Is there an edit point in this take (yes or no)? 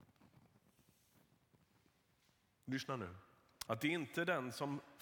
yes